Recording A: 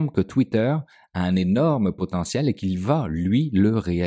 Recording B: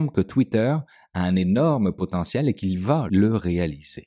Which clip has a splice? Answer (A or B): B